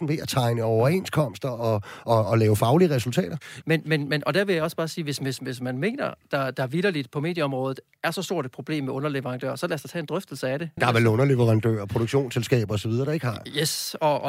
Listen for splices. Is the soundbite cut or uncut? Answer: cut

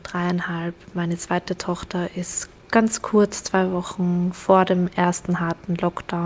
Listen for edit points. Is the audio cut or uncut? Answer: uncut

